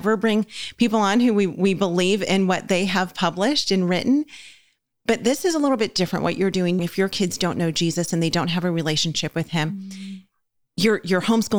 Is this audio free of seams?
no; 1 cut; at 6.8 s

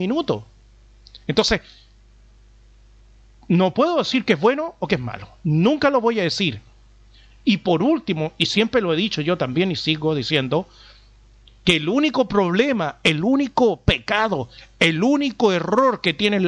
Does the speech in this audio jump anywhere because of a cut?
no; 0 cuts

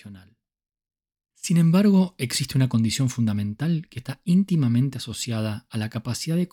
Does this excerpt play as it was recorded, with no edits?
no; 1 cut; at 1.3 s

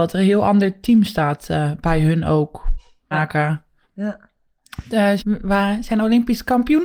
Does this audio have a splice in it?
yes; 2 cuts; at 3.1 s, 5.2 s

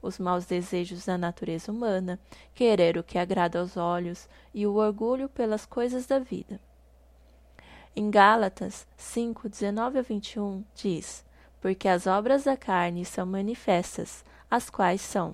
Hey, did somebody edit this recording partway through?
no; 0 cuts

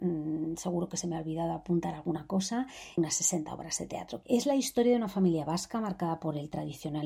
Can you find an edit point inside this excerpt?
yes; 2 cuts; at 3.0 s, 4.2 s

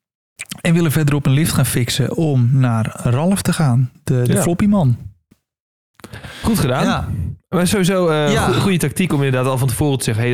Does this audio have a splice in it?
no; 0 cuts

